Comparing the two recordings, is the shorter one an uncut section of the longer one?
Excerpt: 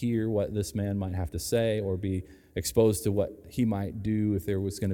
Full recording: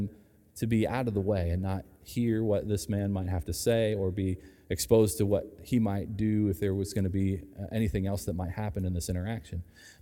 yes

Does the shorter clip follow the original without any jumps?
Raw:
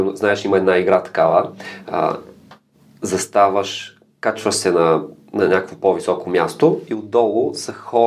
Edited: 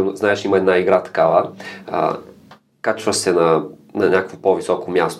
no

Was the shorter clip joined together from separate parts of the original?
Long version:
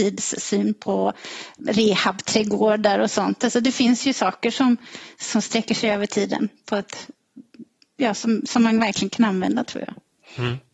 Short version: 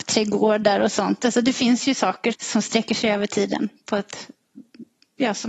yes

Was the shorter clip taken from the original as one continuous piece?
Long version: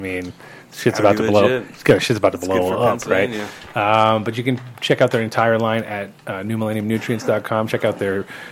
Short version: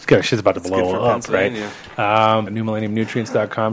no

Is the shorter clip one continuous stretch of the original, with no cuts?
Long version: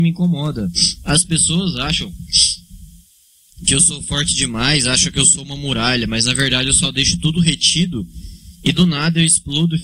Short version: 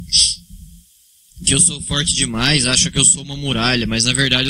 yes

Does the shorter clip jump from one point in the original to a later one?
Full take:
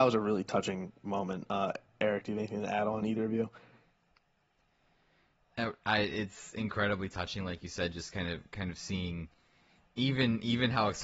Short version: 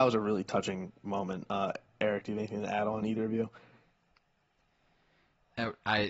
no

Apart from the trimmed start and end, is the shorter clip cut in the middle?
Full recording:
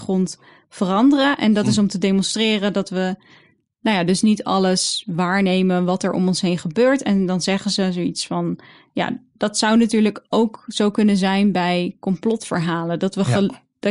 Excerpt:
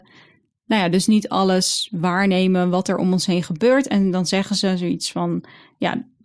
no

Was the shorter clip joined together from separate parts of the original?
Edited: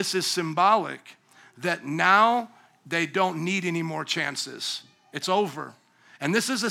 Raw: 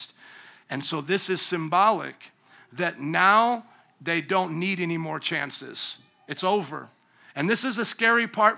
no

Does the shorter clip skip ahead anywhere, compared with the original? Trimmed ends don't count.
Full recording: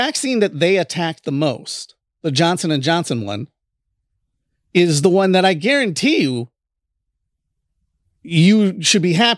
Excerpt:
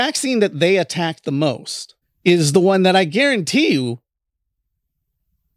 yes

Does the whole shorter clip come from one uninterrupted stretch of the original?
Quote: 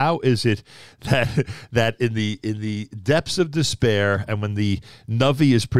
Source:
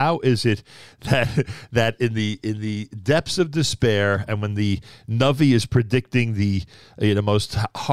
yes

